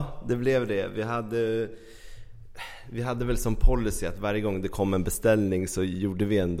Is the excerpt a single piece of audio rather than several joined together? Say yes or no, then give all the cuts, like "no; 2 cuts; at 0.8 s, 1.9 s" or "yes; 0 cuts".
yes; 0 cuts